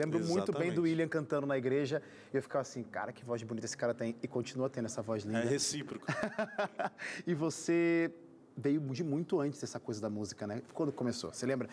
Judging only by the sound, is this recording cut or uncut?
uncut